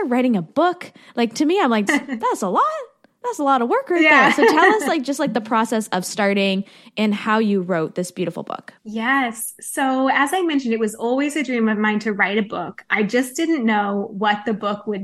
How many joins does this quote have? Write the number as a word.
two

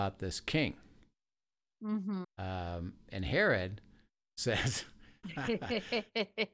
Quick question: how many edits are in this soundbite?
two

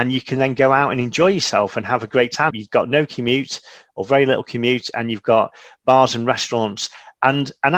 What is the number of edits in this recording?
one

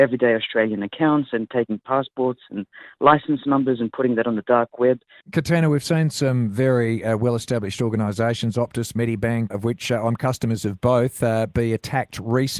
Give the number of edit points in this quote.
two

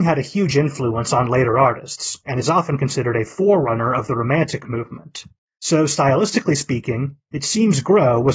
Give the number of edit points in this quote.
zero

